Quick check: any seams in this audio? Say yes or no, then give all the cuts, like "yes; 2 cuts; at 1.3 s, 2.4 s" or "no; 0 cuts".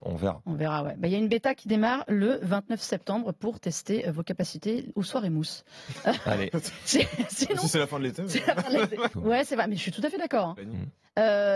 yes; 1 cut; at 9.1 s